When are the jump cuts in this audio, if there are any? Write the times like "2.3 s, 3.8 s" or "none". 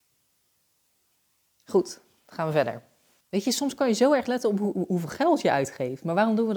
3.2 s